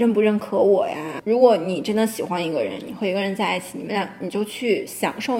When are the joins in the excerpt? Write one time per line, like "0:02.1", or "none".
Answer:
0:01.2